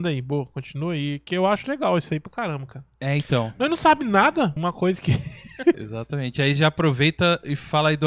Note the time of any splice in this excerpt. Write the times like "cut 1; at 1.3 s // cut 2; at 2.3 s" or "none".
cut 1; at 4.6 s // cut 2; at 5.7 s